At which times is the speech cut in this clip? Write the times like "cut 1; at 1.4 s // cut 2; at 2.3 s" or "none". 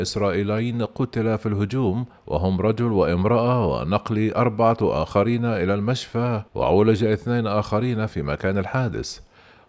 cut 1; at 2.2 s // cut 2; at 6.5 s